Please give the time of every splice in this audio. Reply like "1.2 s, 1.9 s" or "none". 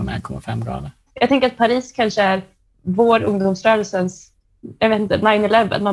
1.1 s

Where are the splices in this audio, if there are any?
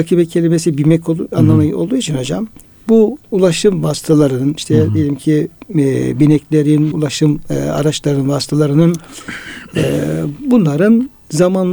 6.9 s

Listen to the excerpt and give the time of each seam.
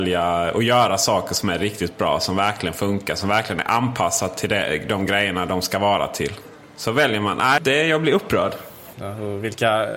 7.6 s, 8.9 s

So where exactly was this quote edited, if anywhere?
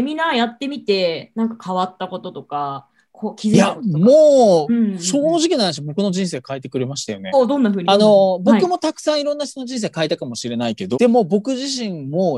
7.3 s, 10.9 s

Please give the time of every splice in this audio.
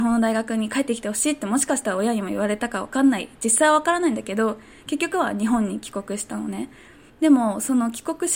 7.1 s

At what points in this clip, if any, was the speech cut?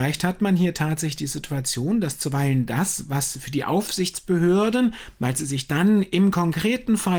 none

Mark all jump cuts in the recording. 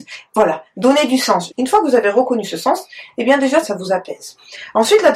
1.5 s, 3.6 s

